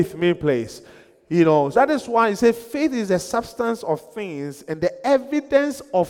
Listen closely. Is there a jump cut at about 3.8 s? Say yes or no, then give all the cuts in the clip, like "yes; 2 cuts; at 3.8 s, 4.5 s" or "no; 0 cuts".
no; 1 cut; at 1.7 s